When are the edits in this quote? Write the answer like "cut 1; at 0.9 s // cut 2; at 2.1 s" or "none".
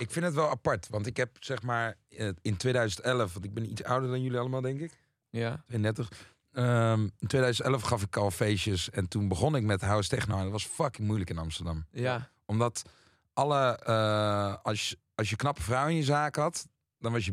none